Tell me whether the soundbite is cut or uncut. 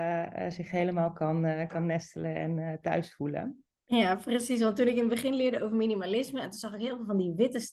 uncut